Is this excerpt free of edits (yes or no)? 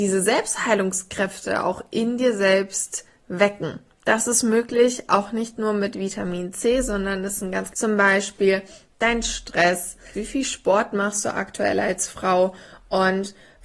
no